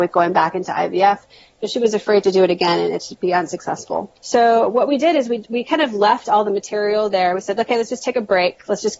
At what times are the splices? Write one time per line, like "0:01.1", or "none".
0:04.2